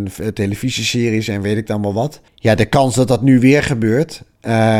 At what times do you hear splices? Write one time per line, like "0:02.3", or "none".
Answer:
0:02.3